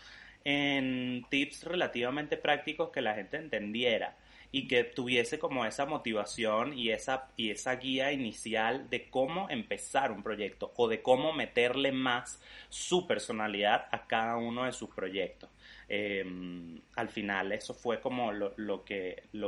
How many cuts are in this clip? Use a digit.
0